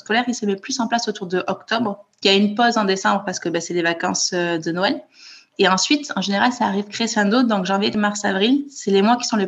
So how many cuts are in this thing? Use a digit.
1